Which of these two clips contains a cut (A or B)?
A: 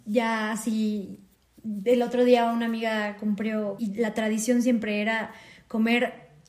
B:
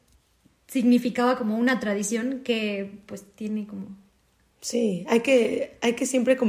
A